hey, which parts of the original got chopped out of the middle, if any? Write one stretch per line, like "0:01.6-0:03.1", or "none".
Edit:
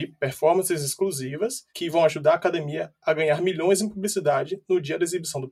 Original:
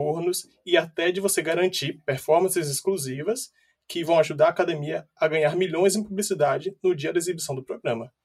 0:03.6-0:03.8